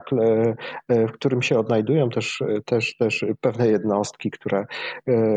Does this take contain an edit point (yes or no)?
no